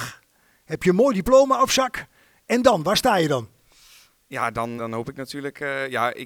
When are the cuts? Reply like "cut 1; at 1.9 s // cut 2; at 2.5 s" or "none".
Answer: cut 1; at 4.8 s

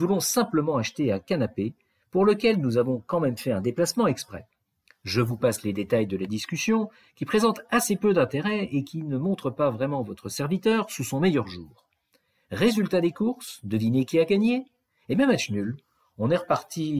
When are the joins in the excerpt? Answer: none

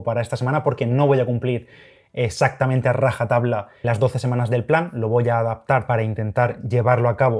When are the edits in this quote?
cut 1; at 3.8 s

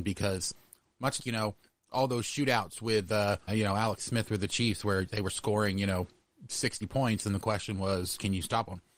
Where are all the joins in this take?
cut 1; at 1.2 s // cut 2; at 3.5 s

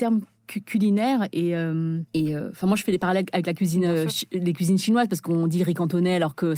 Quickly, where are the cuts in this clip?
cut 1; at 2.1 s

